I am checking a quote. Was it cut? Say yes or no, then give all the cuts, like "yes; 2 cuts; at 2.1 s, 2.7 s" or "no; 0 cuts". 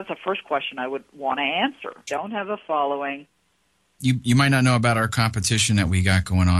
yes; 2 cuts; at 2.1 s, 4.0 s